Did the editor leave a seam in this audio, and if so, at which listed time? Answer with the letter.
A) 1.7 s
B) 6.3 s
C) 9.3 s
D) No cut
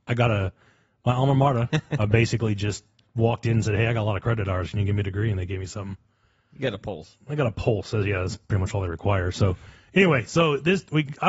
A